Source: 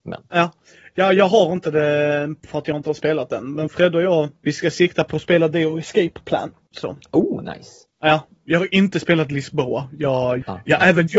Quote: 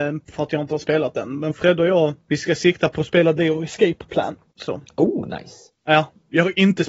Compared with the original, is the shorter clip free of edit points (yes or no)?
yes